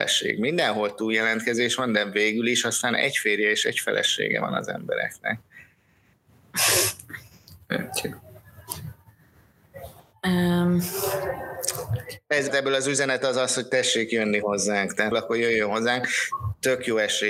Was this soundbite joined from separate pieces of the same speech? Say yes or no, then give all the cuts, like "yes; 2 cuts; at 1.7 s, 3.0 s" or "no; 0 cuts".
yes; 2 cuts; at 12.5 s, 15.1 s